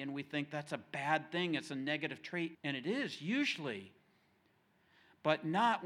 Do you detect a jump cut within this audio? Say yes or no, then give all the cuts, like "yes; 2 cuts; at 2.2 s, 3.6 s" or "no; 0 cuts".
yes; 1 cut; at 2.5 s